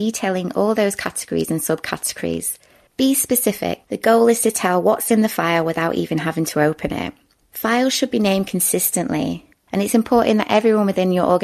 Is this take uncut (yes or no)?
no